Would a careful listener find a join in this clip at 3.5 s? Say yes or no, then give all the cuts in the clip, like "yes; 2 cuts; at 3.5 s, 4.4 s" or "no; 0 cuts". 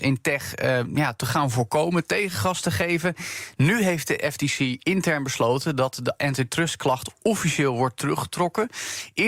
no; 0 cuts